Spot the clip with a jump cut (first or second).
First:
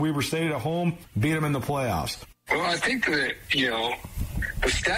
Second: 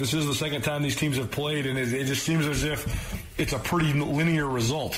first